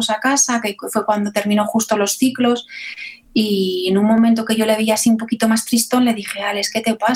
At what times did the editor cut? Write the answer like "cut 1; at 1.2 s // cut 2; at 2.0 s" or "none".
none